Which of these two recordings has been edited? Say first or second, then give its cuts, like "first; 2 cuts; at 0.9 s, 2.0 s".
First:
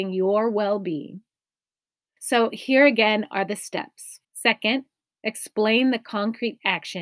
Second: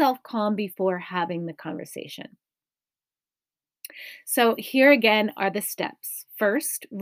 first; 2 cuts; at 2.2 s, 4.2 s